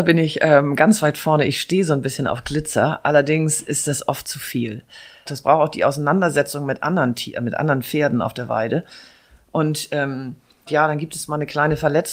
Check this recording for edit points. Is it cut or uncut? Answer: cut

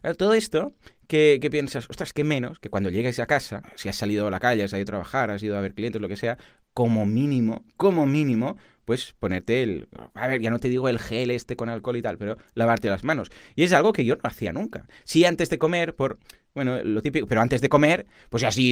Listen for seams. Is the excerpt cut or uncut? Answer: uncut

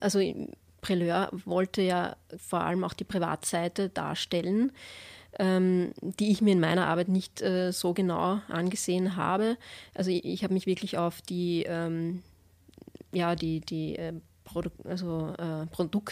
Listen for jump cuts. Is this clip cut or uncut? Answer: cut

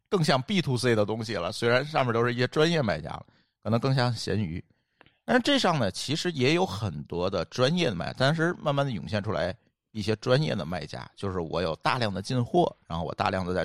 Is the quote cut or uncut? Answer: uncut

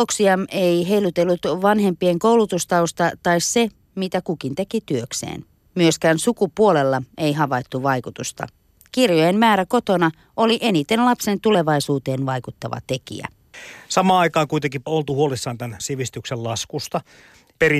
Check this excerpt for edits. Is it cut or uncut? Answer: uncut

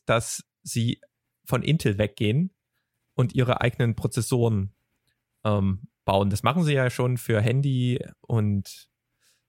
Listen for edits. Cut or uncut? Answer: uncut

